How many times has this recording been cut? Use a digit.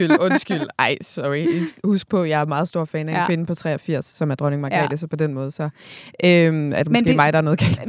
0